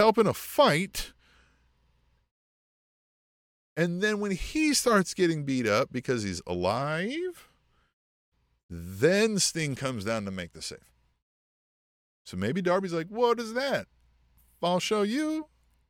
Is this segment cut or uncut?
uncut